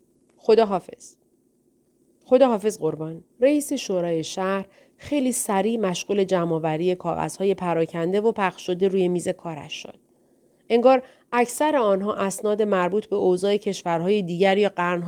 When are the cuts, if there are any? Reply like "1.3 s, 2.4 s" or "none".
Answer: 3.3 s